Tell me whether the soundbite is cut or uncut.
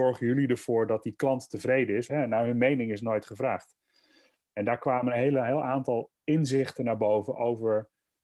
cut